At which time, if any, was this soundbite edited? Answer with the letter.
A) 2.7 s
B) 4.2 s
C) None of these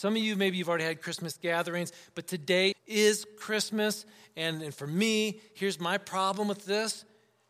A